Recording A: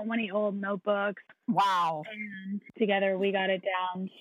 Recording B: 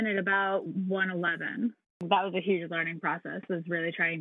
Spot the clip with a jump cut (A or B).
A